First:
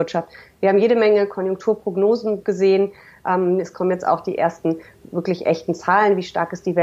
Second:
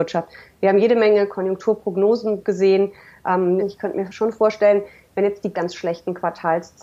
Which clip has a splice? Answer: second; 2 cuts; at 3.6 s, 5.5 s

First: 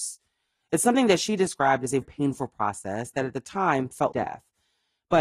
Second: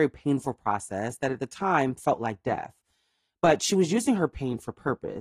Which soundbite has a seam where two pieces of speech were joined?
first; 2 cuts; at 2.0 s, 4.1 s

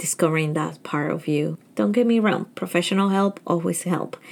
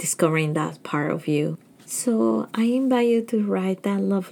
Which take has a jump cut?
first; 1 cut; at 1.7 s

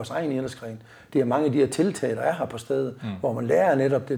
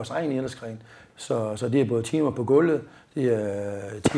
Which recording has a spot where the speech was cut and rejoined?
second; 1 cut; at 1.1 s

